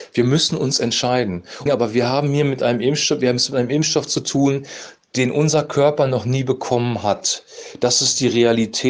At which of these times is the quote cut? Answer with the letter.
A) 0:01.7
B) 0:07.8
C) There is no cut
A